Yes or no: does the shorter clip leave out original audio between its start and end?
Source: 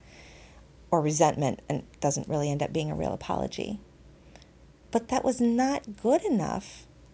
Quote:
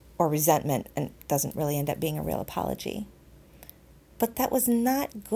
no